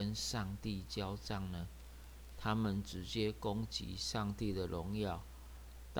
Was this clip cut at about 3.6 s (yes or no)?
no